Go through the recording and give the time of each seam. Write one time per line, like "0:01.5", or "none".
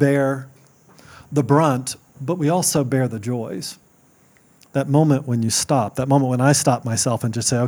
none